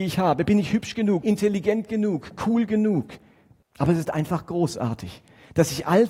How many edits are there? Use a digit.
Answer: 2